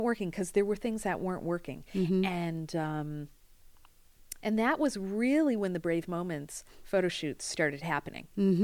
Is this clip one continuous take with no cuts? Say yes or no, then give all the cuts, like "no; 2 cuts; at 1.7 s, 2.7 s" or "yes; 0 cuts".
yes; 0 cuts